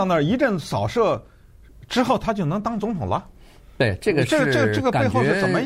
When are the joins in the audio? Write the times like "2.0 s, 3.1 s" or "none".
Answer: none